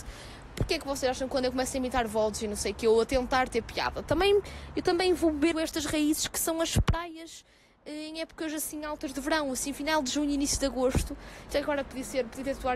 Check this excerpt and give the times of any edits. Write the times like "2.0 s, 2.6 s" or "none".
5.5 s, 11.5 s